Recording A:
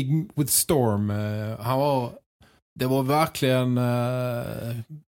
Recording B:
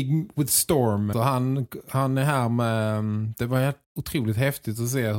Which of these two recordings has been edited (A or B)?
B